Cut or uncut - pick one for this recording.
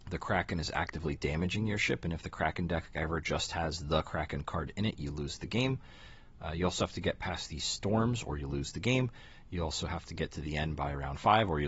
uncut